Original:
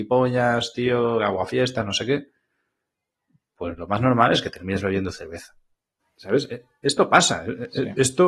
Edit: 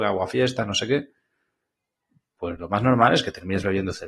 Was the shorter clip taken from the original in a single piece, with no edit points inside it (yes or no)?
yes